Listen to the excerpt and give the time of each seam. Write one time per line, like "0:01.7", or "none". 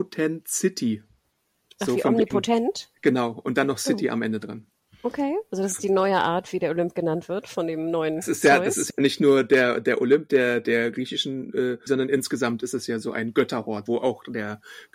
0:11.9
0:13.9

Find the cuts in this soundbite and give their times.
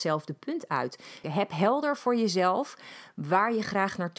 0:01.2

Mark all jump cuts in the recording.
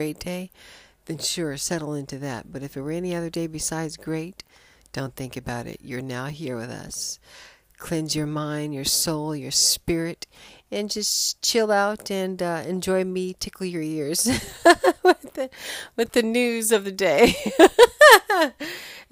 none

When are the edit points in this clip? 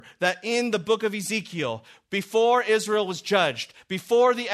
none

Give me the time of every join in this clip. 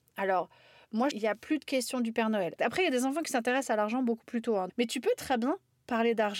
0:01.1
0:02.6
0:04.7

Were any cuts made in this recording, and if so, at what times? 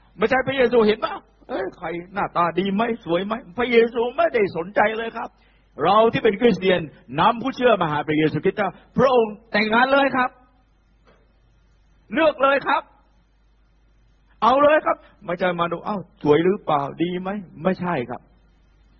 none

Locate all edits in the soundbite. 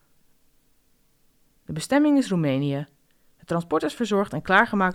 0:01.6

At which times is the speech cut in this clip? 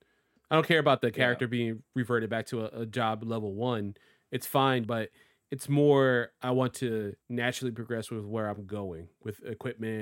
0:04.8
0:07.2

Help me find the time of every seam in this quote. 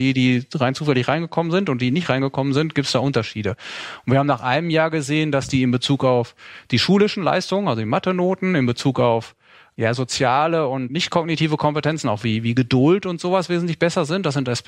none

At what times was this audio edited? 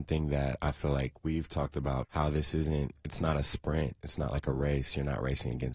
0:02.0

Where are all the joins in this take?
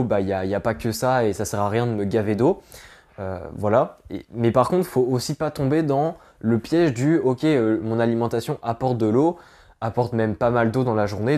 none

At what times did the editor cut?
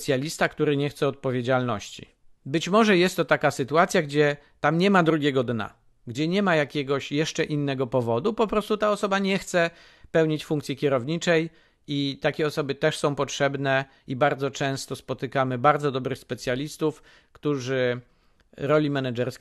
0:02.4

